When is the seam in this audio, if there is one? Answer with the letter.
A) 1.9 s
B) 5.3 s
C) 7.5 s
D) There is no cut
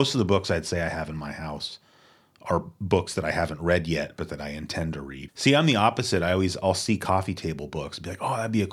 B